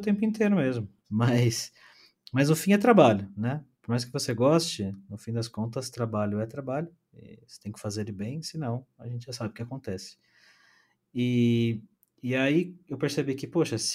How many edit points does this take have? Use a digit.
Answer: 1